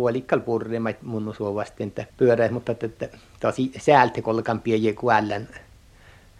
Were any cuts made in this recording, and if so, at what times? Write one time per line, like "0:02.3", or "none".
0:02.1